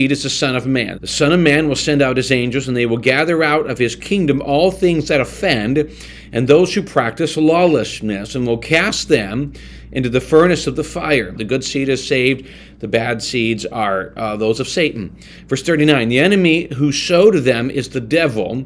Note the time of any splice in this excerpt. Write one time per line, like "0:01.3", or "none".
0:00.9
0:11.3

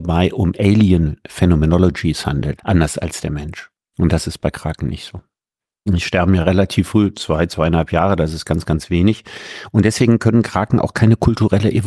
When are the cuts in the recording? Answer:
0:02.6
0:03.9
0:05.9

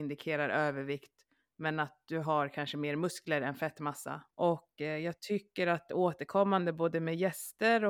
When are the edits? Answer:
0:04.3

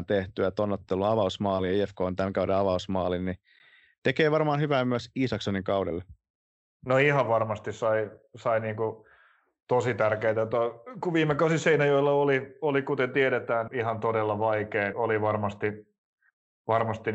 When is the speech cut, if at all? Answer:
0:13.7
0:14.9

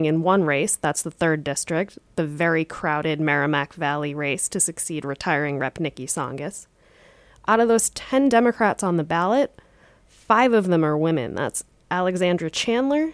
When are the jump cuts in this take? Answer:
none

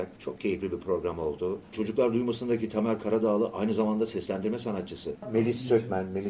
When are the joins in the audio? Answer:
0:01.7
0:05.1

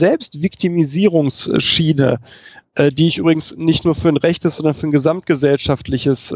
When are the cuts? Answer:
none

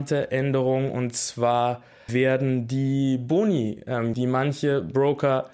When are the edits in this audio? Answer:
0:02.1
0:04.1

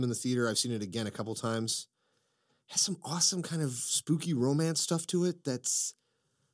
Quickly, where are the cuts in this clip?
none

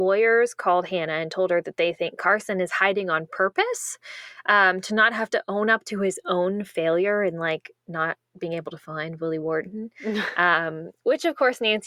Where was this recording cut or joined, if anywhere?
none

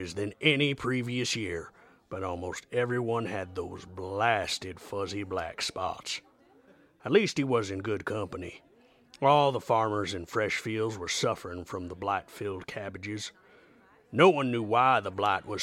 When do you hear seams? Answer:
none

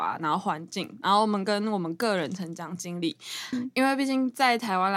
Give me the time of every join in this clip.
0:03.5

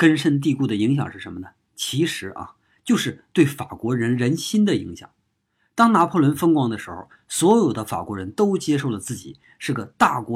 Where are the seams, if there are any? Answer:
none

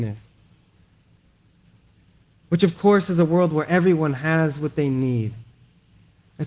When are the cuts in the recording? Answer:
none

